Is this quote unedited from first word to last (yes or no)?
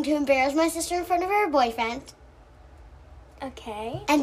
yes